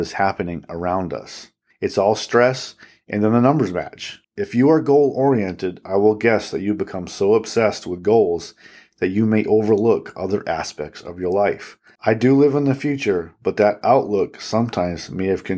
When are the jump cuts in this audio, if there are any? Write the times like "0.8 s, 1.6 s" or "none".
1.7 s, 4.2 s, 12.0 s